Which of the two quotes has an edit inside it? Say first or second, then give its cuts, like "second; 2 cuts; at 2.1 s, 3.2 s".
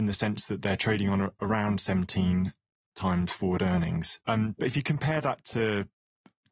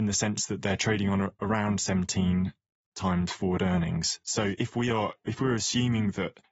first; 1 cut; at 4.2 s